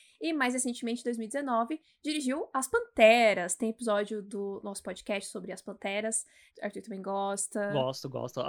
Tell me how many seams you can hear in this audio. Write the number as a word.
one